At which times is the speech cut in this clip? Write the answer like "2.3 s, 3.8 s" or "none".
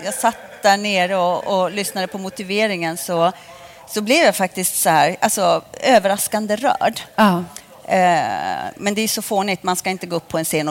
none